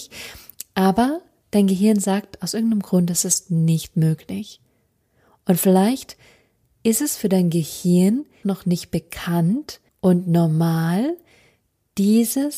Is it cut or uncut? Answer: cut